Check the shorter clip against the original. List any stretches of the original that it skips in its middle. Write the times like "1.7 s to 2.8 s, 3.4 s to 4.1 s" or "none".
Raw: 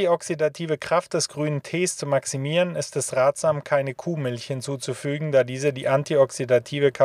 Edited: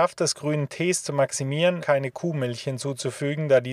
2.7 s to 3.6 s